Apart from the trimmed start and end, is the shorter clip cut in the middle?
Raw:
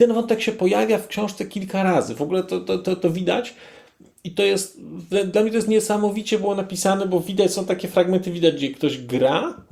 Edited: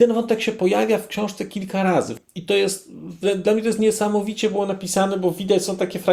yes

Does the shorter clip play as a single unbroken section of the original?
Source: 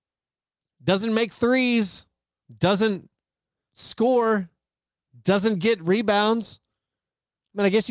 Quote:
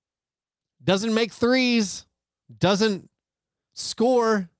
yes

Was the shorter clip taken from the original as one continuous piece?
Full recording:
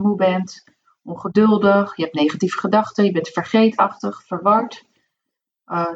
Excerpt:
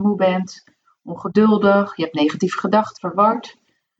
no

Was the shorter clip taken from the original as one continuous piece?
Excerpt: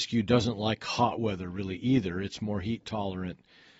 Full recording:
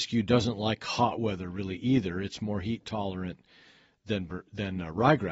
yes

